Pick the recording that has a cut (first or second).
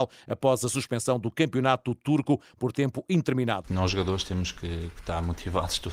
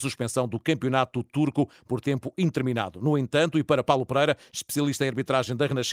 first